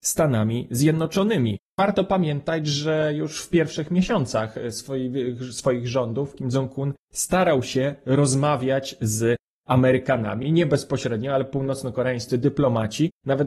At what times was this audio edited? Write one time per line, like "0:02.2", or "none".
none